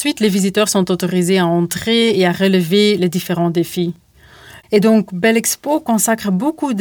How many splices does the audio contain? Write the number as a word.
one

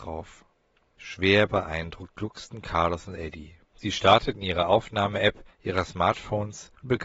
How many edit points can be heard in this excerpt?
two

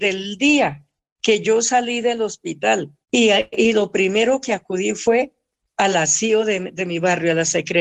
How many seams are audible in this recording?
one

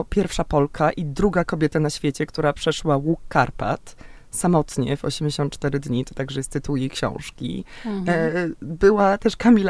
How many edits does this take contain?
zero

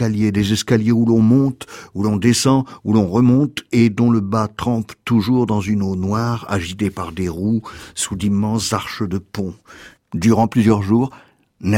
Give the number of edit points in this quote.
one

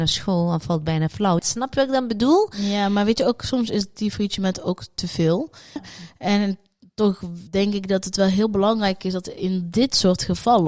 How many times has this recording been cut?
two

